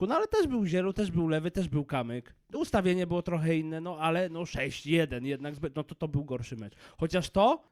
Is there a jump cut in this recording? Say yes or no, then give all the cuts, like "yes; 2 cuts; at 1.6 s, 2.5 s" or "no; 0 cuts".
no; 0 cuts